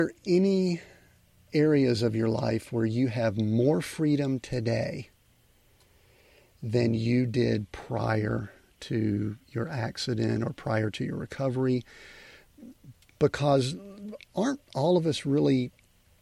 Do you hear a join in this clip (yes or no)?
no